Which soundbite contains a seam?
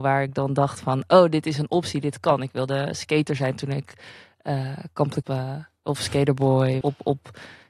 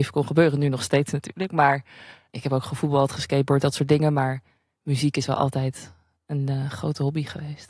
first; 2 cuts; at 5.2 s, 6.8 s

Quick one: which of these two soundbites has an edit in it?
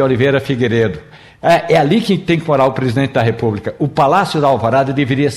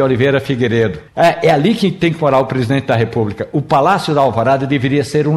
second; 1 cut; at 1.1 s

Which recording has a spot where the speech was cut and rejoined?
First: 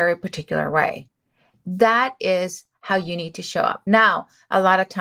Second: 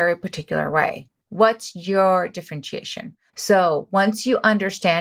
second; 2 cuts; at 1.2 s, 3.3 s

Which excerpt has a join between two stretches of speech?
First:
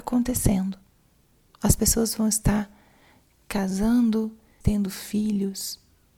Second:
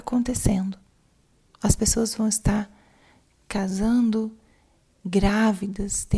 first; 1 cut; at 4.6 s

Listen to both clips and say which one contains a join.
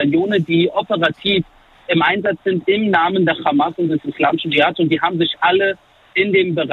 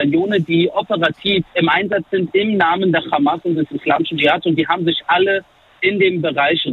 second; 1 cut; at 1.5 s

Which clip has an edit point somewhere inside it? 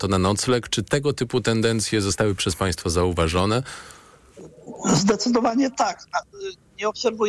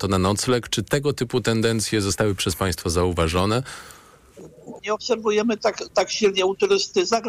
second; 1 cut; at 4.8 s

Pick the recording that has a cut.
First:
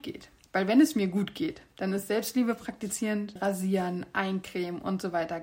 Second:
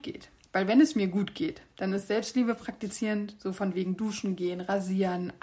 first; 1 cut; at 3.4 s

